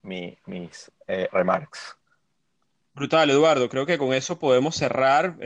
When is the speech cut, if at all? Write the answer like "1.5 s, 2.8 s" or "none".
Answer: none